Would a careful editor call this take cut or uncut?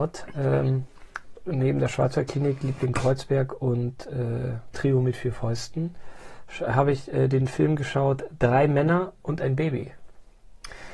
uncut